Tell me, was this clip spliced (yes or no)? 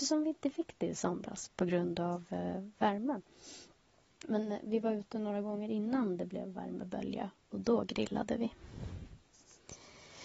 no